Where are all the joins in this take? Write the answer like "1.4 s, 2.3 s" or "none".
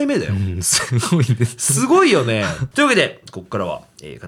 2.7 s